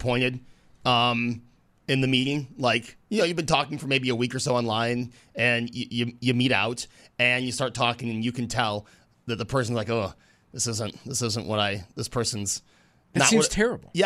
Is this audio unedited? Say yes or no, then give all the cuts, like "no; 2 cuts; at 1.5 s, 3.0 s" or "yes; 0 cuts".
yes; 0 cuts